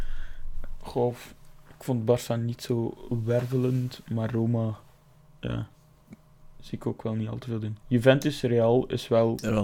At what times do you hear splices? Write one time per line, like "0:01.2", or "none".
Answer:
0:07.8